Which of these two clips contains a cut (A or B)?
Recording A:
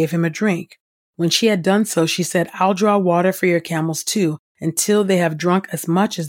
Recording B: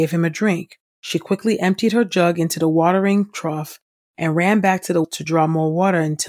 B